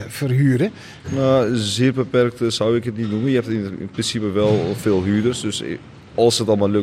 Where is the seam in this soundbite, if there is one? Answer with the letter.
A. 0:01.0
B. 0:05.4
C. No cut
A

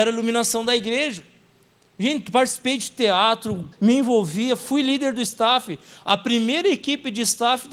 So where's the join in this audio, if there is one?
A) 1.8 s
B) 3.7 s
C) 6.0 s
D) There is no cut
B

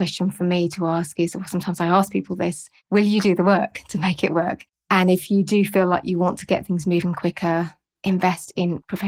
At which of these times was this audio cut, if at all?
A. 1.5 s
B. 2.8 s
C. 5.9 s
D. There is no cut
B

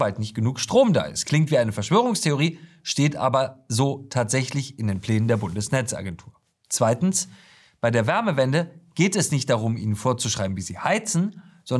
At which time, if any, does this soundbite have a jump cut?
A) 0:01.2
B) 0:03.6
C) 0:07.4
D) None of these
D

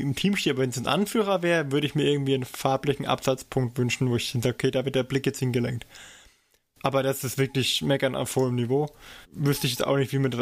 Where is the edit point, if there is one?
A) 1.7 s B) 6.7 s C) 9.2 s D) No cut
C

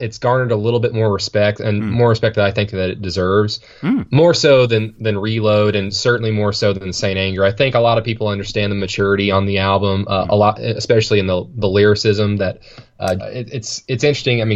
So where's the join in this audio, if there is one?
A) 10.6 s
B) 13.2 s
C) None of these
B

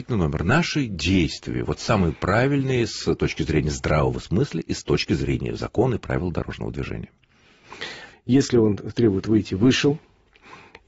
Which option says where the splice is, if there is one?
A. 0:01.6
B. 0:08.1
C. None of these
B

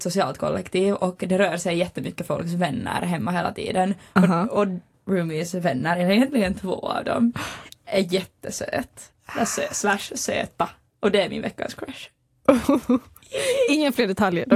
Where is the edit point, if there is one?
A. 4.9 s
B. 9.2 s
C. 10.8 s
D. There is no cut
A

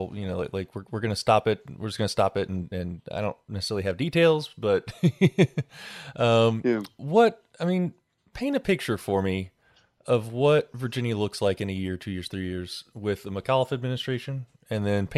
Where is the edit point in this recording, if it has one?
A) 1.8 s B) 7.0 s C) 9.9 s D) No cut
D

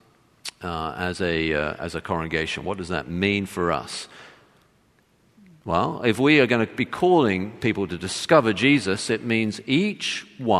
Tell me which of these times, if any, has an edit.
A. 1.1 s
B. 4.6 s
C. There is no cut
C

